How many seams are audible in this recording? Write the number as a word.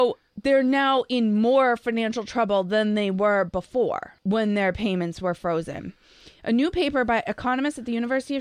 one